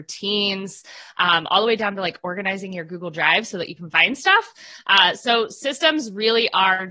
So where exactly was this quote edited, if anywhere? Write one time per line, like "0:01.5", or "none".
none

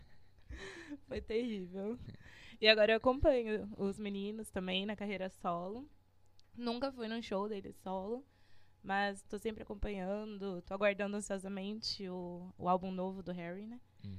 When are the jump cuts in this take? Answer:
0:02.1
0:10.6

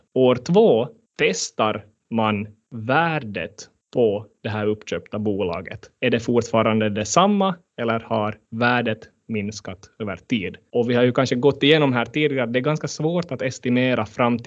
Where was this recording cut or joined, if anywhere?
none

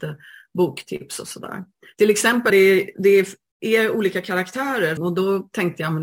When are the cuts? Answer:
0:02.5
0:05.0

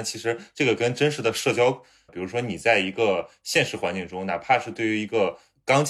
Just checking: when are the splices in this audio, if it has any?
0:02.1

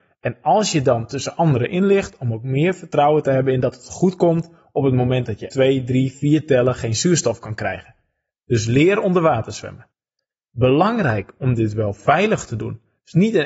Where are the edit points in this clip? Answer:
0:05.5

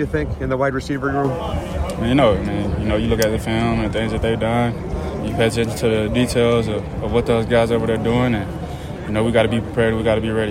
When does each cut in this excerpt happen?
none

